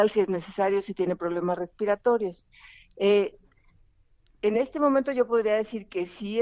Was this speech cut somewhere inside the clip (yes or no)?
no